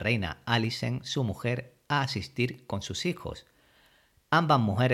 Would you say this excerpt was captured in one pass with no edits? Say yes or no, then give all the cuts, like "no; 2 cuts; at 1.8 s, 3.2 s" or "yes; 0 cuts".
yes; 0 cuts